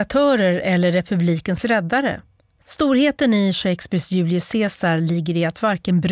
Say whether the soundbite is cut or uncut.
cut